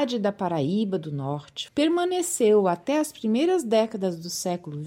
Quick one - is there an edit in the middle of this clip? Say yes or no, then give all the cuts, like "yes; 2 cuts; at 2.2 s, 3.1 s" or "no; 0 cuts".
yes; 1 cut; at 1.7 s